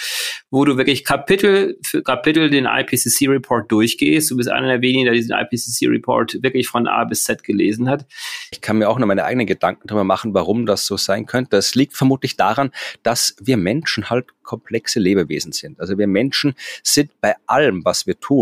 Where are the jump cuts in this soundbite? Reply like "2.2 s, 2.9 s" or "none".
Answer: 8.5 s